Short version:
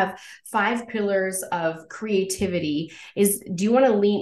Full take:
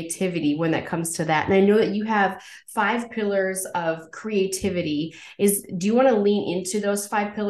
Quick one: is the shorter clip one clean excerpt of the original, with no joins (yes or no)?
yes